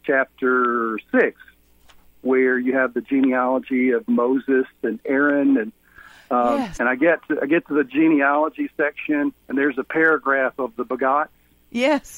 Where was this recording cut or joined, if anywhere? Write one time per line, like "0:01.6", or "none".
0:06.8
0:09.4